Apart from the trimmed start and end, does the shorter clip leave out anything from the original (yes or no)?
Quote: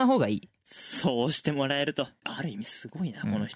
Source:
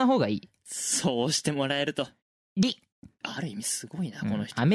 yes